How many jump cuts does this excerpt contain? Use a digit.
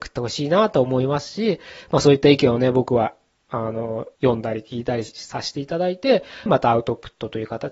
2